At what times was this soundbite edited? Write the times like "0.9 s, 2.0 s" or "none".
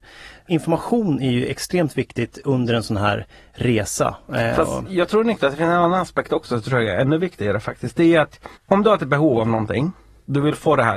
8.6 s